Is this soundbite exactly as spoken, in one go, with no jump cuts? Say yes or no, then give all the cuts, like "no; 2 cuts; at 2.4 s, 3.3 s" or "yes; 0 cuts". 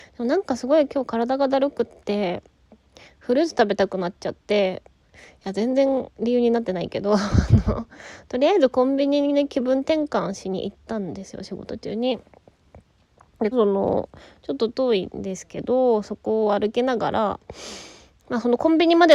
no; 1 cut; at 13.5 s